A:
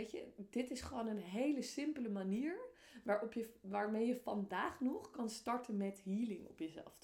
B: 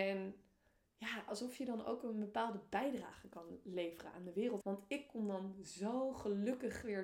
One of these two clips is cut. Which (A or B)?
B